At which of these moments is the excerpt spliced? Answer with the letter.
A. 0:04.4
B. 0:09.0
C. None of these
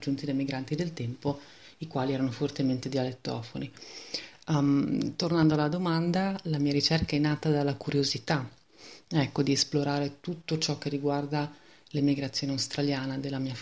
A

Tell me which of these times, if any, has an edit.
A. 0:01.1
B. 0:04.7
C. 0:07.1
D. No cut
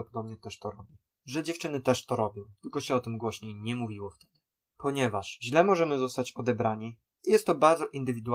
B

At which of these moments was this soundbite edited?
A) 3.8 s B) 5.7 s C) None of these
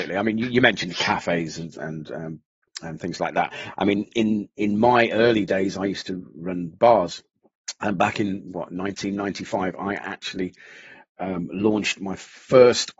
C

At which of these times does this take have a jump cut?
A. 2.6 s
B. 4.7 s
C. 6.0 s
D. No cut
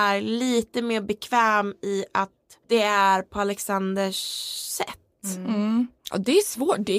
A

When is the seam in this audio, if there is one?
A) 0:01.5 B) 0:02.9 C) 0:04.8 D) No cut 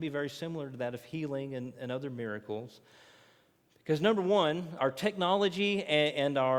C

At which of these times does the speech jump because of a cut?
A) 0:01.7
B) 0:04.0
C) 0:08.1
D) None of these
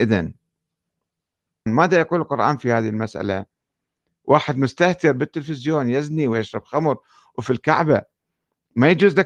A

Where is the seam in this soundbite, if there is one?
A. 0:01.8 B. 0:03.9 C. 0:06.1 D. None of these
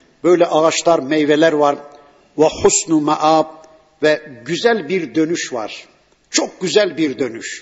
D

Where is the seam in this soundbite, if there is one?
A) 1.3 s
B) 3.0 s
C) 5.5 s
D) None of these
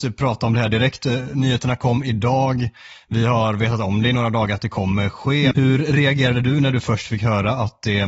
C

